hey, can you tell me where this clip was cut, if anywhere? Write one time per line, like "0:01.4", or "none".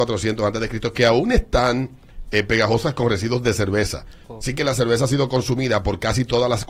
0:04.4